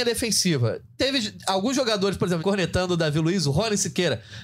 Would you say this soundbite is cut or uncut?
cut